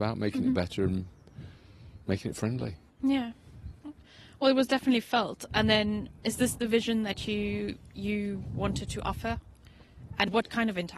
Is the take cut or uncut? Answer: uncut